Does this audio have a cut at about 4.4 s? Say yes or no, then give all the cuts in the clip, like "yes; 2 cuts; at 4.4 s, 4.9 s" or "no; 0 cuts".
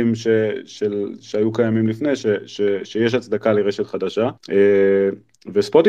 yes; 1 cut; at 4.4 s